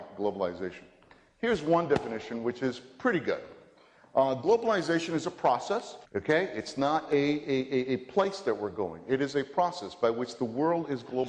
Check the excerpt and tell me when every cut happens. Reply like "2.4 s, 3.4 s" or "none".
6.0 s